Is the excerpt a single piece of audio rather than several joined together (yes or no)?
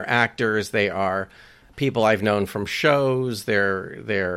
yes